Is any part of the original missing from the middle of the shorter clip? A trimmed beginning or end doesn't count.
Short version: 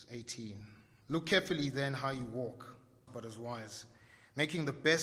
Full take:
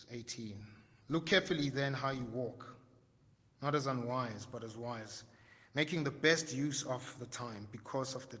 yes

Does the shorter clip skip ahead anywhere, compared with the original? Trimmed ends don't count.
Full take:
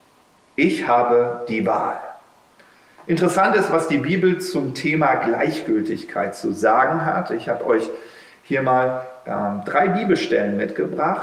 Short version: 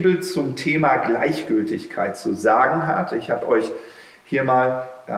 no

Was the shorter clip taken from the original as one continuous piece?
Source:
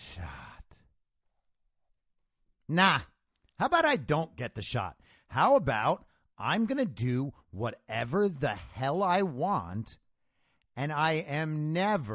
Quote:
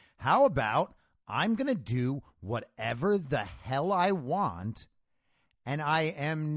yes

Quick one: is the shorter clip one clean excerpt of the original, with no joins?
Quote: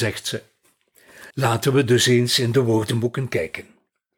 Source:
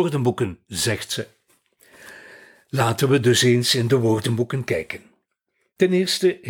no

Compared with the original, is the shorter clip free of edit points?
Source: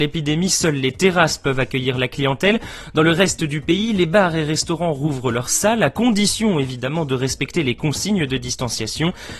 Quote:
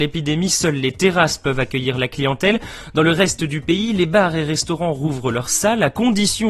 yes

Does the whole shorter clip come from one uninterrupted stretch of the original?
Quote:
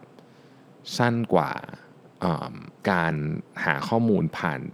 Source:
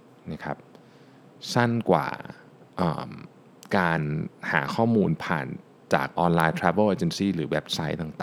no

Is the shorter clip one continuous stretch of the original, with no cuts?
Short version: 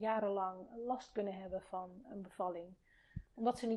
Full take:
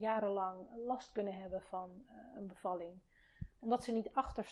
no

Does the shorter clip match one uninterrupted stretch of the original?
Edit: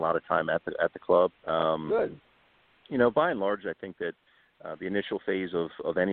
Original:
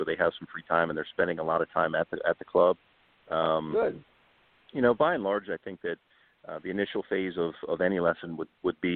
no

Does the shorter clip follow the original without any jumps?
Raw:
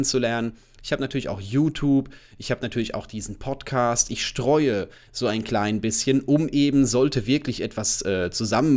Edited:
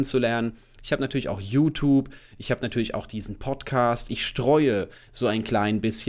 yes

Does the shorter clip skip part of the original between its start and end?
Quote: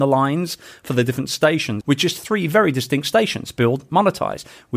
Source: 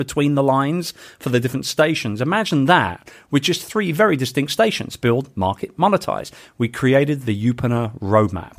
yes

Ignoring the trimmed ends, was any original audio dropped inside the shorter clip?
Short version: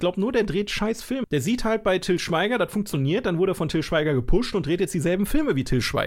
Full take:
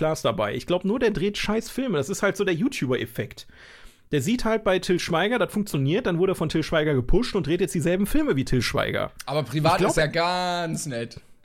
yes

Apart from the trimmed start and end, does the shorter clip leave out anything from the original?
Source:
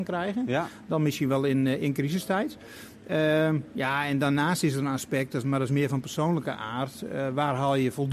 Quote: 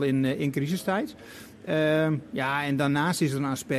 no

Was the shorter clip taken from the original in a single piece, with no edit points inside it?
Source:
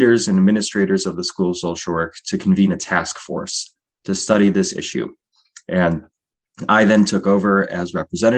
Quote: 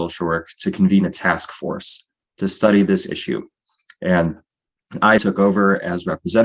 no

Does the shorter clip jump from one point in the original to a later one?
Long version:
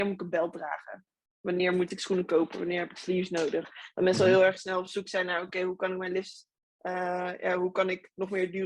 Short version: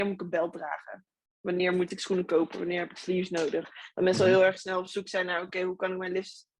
no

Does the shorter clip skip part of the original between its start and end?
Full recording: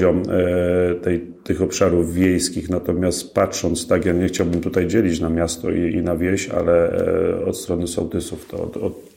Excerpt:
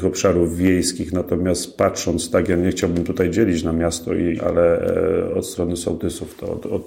yes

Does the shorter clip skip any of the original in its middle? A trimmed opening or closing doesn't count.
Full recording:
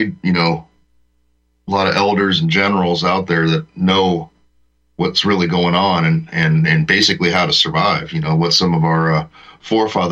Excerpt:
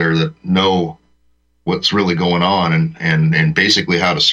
no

